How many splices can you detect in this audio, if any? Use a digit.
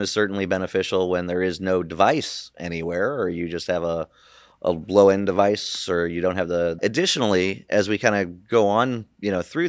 1